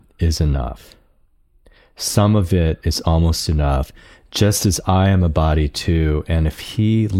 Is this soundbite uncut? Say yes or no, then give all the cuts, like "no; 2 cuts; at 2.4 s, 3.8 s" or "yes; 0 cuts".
yes; 0 cuts